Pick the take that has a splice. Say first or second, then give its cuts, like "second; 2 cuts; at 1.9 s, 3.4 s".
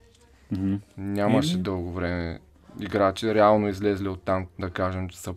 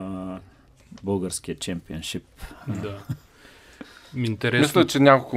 first; 1 cut; at 4.5 s